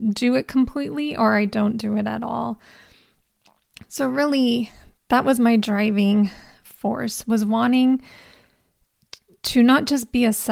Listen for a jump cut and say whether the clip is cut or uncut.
uncut